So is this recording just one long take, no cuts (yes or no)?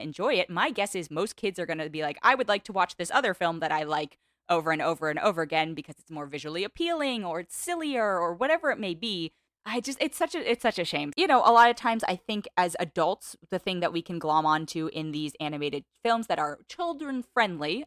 no